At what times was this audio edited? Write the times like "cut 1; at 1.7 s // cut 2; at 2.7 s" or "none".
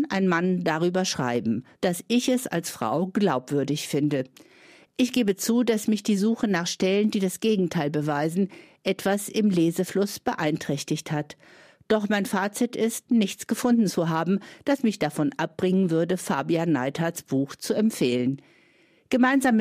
cut 1; at 1.8 s